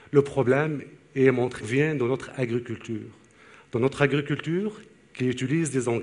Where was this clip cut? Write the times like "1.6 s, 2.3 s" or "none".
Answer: 1.6 s